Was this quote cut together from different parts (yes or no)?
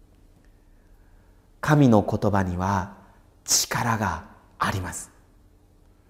no